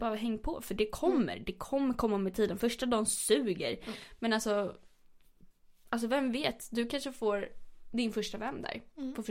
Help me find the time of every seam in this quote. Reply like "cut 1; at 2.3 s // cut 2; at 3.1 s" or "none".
none

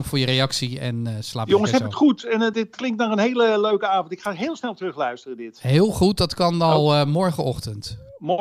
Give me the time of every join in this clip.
cut 1; at 2.5 s

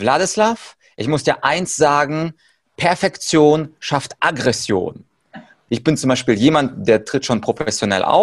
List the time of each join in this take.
cut 1; at 5.7 s

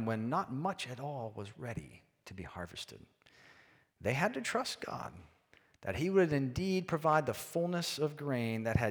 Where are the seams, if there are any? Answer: none

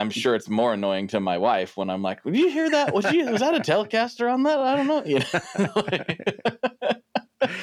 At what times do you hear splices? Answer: none

